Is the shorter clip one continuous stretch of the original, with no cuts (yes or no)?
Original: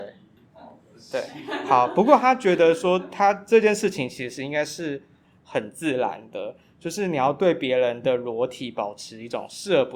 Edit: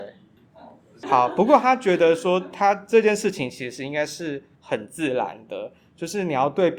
no